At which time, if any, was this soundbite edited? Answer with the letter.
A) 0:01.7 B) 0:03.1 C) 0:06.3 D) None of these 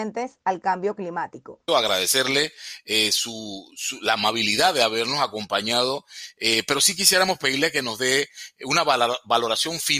A